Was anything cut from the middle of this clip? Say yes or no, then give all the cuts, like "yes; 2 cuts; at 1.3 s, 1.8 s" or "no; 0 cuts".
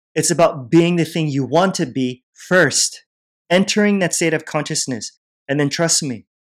no; 0 cuts